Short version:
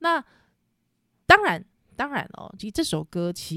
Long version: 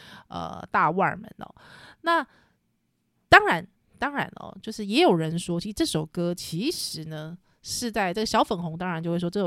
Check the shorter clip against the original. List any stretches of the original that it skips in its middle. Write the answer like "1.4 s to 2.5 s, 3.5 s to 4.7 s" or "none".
4.6 s to 5.6 s